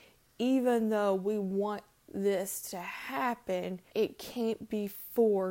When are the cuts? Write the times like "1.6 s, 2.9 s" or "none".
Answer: 3.9 s